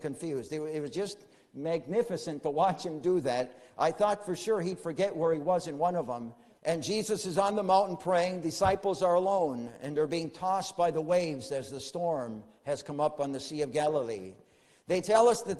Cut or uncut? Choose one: cut